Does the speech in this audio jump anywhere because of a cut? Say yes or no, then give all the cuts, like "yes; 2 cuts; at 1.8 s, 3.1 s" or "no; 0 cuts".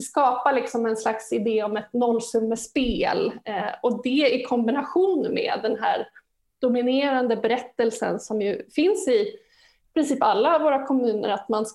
no; 0 cuts